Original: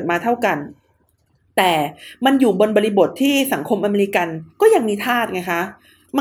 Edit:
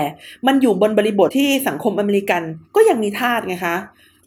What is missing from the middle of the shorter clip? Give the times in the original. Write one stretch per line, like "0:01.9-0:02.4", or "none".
0:03.1-0:03.1